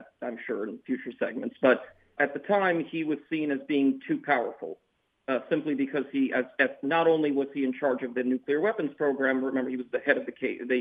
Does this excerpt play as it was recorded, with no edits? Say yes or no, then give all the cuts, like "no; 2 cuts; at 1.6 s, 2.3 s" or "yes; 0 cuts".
no; 1 cut; at 2.2 s